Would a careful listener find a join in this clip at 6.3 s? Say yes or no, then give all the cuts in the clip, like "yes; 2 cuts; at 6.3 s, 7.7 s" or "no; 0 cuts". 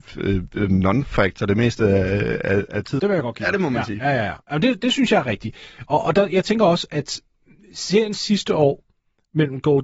no; 1 cut; at 3.0 s